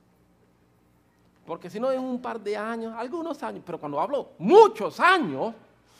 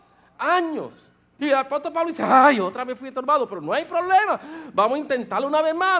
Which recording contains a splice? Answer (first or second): second